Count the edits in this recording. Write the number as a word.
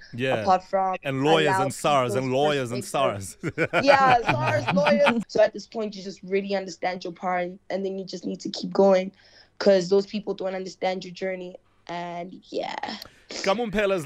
one